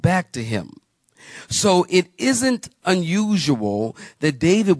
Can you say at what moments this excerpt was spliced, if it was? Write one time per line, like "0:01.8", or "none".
none